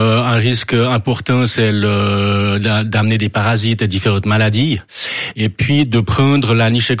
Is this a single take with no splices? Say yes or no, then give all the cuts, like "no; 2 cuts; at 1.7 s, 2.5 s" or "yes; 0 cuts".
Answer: yes; 0 cuts